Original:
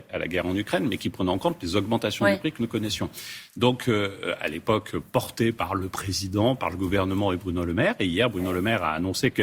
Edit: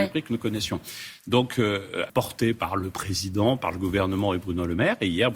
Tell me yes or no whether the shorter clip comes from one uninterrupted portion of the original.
no